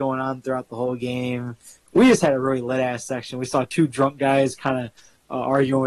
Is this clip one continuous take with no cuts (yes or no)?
yes